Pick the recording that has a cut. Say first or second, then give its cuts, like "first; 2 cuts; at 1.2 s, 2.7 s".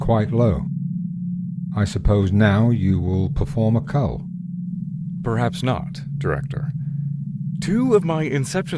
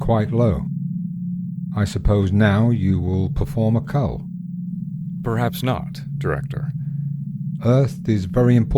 second; 1 cut; at 7.6 s